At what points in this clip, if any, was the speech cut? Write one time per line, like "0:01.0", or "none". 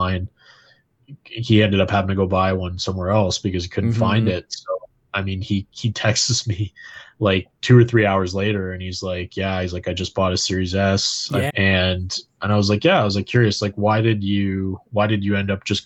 0:11.5